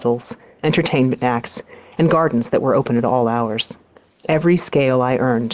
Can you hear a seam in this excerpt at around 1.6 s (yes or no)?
no